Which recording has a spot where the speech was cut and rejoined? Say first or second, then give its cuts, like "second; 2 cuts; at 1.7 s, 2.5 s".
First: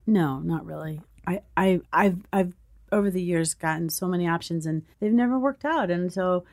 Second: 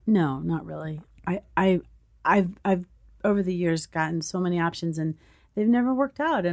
first; 2 cuts; at 1.9 s, 4.9 s